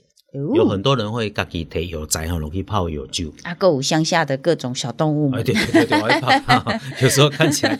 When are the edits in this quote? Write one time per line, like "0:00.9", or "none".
none